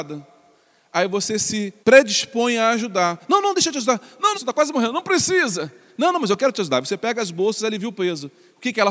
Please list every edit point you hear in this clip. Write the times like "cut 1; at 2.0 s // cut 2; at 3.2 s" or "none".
cut 1; at 1.8 s // cut 2; at 4.3 s